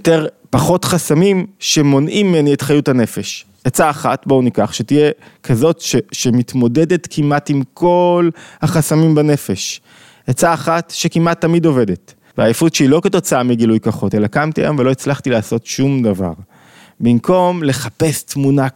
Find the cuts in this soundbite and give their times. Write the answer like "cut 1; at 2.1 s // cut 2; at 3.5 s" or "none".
cut 1; at 12.3 s